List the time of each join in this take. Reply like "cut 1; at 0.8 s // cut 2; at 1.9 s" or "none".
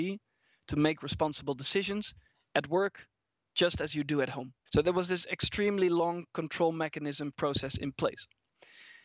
cut 1; at 4.7 s

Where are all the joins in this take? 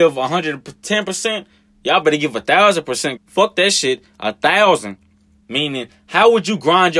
cut 1; at 3.2 s // cut 2; at 5.4 s

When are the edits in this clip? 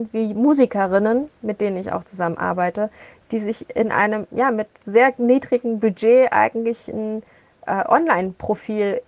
none

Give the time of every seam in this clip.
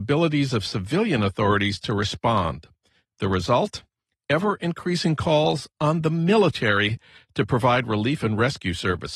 none

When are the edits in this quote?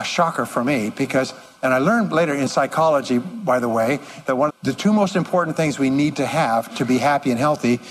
cut 1; at 4.5 s

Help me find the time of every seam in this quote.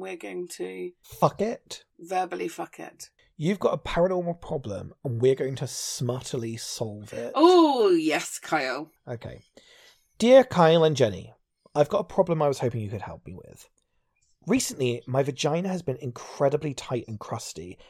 none

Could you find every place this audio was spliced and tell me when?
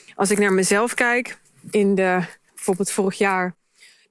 cut 1; at 2.5 s

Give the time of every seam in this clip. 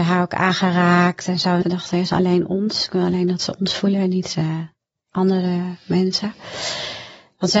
cut 1; at 1.6 s

